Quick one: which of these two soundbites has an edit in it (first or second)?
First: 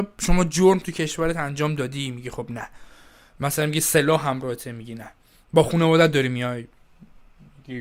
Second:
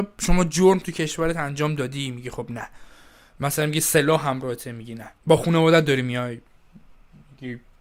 second